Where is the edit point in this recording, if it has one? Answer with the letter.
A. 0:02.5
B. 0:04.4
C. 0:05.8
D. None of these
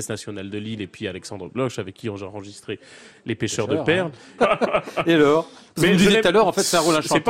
B